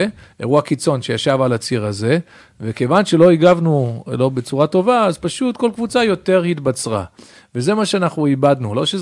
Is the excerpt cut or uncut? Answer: uncut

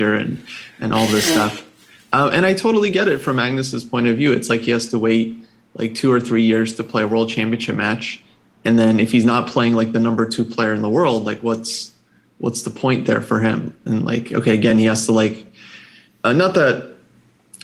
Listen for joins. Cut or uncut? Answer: uncut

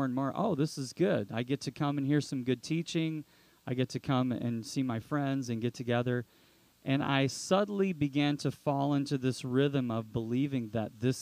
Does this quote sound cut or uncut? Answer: uncut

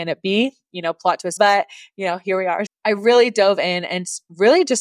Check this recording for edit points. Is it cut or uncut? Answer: cut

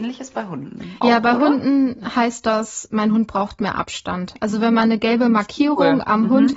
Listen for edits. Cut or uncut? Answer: uncut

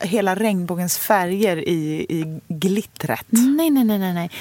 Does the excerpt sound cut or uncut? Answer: uncut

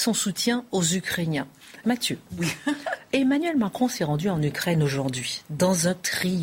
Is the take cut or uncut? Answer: cut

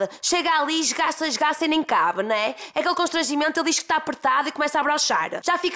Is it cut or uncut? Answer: uncut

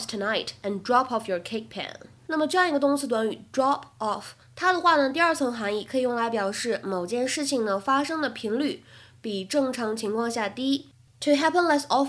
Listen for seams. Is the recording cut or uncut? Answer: cut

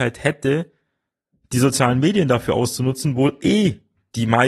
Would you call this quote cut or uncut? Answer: uncut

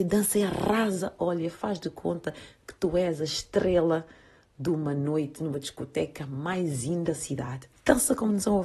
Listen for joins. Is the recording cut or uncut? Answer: cut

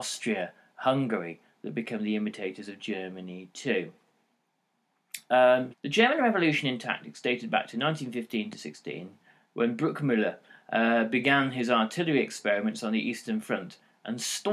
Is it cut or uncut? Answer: cut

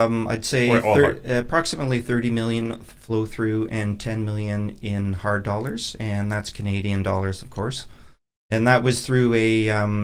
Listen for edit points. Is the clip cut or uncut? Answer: uncut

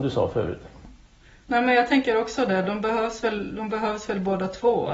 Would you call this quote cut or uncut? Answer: uncut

